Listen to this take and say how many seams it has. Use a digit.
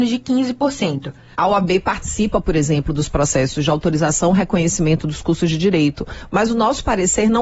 1